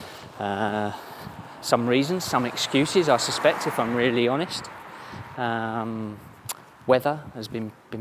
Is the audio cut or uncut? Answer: uncut